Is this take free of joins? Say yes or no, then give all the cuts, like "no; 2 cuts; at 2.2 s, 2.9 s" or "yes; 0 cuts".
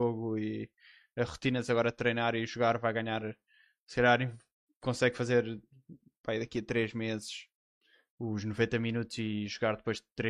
yes; 0 cuts